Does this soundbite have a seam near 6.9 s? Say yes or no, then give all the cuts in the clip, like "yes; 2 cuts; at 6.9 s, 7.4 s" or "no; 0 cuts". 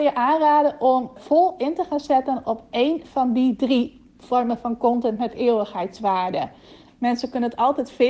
yes; 2 cuts; at 1.2 s, 6.9 s